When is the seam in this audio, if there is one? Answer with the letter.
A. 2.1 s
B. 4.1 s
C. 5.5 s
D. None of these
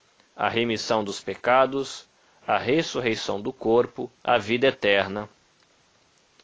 B